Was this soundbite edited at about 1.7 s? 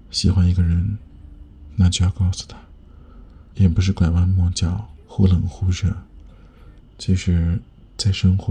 no; 3 cuts; at 3.5 s, 5.0 s, 6.8 s

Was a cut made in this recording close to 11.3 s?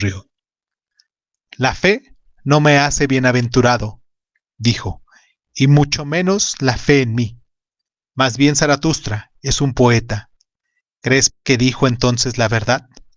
yes; 2 cuts; at 8.1 s, 11.3 s

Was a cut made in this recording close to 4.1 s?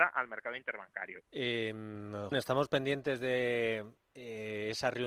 no; 2 cuts; at 1.2 s, 2.3 s

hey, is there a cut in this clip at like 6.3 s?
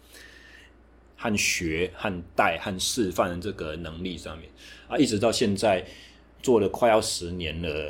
no; 1 cut; at 1.1 s

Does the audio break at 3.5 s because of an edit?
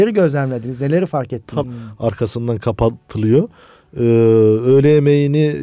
no; 1 cut; at 1.6 s

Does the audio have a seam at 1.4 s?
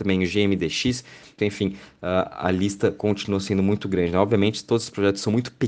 yes; 1 cut; at 1.4 s

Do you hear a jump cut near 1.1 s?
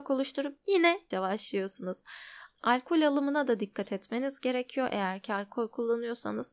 yes; 1 cut; at 1.1 s

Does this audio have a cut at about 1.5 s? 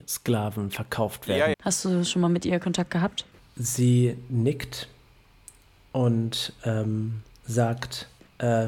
yes; 1 cut; at 1.5 s

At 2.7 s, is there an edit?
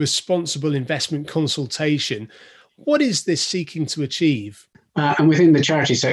no; 1 cut; at 4.9 s

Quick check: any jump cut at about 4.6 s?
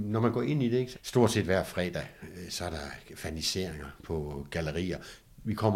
no; 1 cut; at 0.9 s

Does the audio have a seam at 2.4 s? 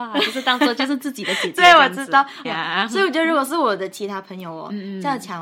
yes; 1 cut; at 2.4 s

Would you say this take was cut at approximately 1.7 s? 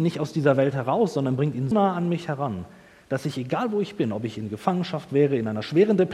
yes; 1 cut; at 1.7 s

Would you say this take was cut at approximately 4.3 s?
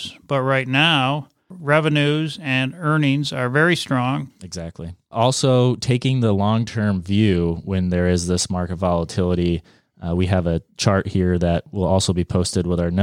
yes; 1 cut; at 4.3 s

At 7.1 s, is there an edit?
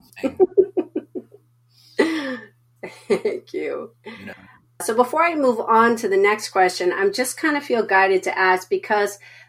no; 1 cut; at 4.8 s

